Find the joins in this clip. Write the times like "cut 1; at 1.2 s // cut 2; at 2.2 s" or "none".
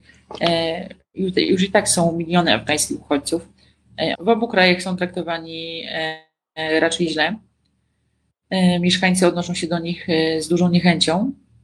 cut 1; at 4.1 s